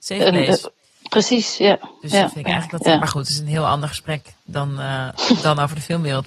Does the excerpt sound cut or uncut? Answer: uncut